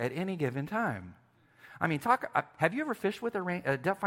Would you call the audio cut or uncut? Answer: uncut